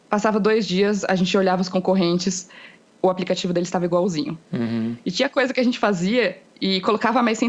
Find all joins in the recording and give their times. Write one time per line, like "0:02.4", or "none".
none